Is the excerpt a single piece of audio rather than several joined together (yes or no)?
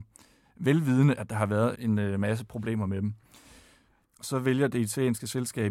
no